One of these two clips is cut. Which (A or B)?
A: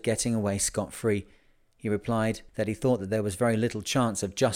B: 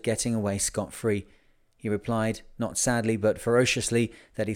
A